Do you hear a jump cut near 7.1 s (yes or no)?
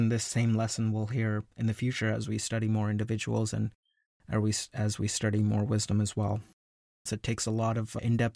yes